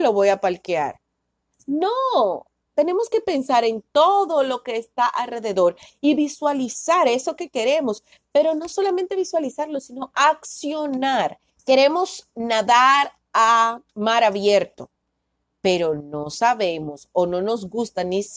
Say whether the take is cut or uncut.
cut